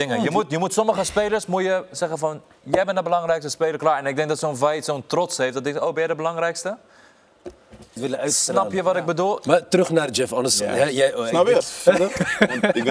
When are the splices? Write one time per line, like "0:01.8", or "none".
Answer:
0:08.0
0:11.6